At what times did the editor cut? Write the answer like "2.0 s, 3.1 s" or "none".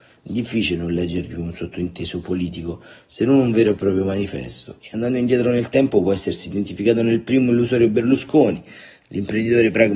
4.8 s

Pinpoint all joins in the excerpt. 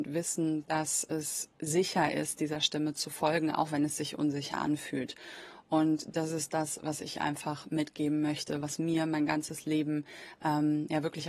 none

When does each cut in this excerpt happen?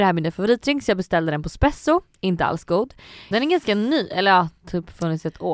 3.3 s

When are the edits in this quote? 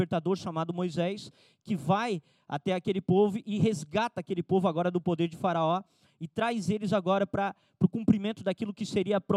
none

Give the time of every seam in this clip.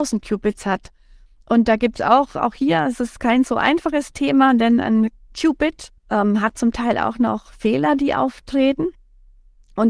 6.0 s

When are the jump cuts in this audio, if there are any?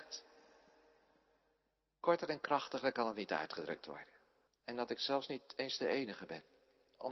4.5 s

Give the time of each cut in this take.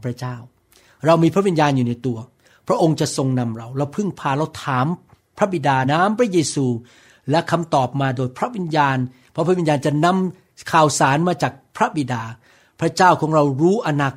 5.8 s

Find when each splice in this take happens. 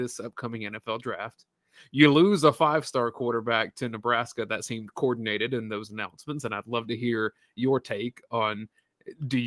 none

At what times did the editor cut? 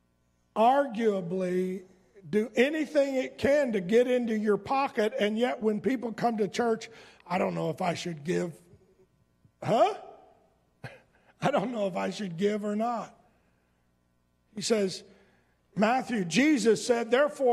14.4 s

